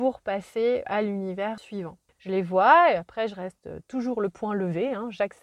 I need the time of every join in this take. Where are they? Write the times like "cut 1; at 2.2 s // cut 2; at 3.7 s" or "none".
cut 1; at 2.1 s